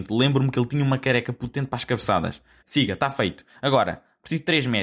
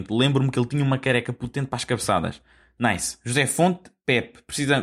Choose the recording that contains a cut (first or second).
first